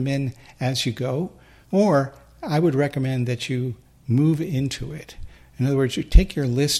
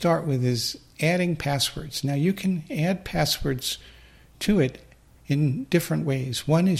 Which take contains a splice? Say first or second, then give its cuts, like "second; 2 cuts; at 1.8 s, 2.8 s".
first; 1 cut; at 1.6 s